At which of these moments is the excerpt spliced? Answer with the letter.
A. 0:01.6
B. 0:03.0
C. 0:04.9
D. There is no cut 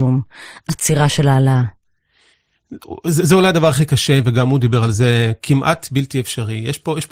C